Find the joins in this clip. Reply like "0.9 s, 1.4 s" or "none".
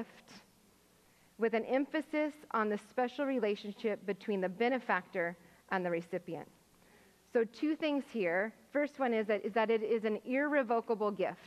none